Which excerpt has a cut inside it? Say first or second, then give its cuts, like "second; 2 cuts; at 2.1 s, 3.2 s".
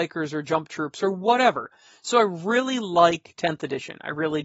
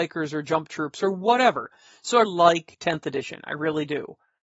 second; 1 cut; at 2.2 s